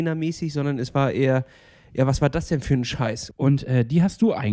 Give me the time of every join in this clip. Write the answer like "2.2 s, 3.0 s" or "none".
3.3 s